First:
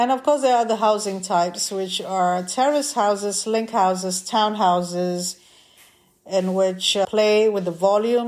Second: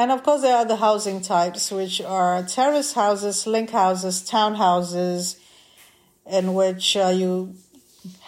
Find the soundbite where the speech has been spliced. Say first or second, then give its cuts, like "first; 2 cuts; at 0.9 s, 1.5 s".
first; 1 cut; at 7.0 s